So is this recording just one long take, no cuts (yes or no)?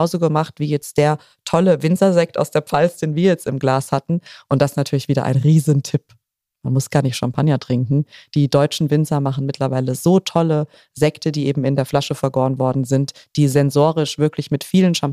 yes